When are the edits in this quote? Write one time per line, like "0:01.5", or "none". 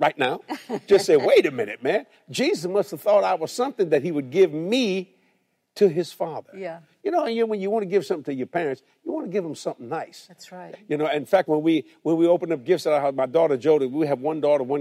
0:10.7